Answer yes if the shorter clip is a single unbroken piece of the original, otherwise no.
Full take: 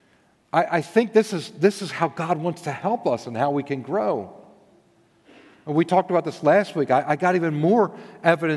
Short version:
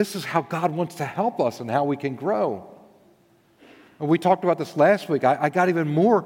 yes